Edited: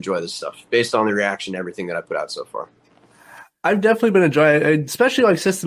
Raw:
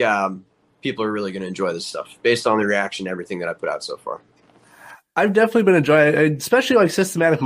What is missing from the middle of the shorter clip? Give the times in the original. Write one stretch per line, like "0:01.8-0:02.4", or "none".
none